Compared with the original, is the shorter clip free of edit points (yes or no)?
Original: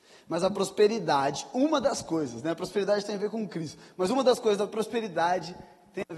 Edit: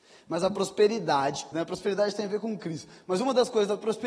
no